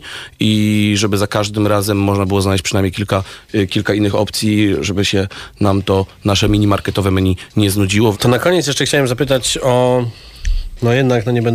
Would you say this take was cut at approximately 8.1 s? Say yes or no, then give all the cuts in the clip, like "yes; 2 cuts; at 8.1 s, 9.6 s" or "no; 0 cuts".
yes; 1 cut; at 8.1 s